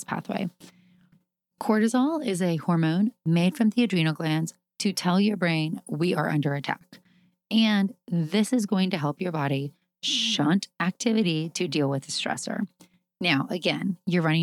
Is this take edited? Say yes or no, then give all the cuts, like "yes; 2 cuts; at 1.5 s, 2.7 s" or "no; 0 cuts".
no; 0 cuts